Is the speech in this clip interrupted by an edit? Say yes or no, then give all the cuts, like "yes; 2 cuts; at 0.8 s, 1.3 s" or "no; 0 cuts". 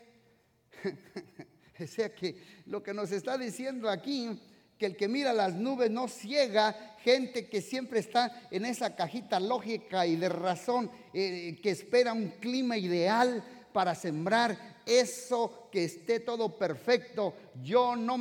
no; 0 cuts